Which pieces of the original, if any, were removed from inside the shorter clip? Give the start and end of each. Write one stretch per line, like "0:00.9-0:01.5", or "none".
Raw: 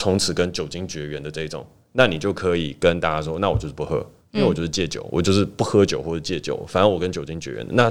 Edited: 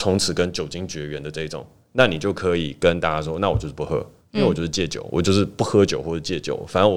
none